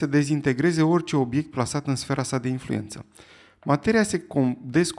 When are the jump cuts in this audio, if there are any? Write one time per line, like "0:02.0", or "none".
none